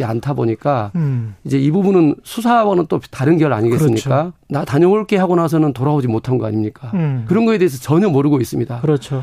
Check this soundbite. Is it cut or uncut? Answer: cut